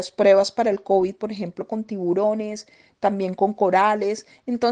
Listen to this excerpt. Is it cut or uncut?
uncut